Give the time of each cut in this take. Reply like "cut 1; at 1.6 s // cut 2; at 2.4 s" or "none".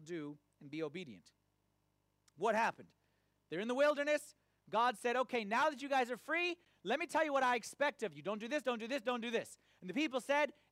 cut 1; at 8.6 s